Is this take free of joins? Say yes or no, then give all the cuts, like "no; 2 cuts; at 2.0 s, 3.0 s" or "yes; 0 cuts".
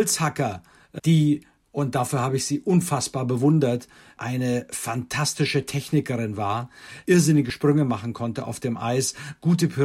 no; 2 cuts; at 1.0 s, 7.1 s